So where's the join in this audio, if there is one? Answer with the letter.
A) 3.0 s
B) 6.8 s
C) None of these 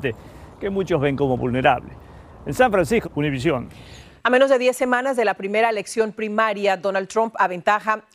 A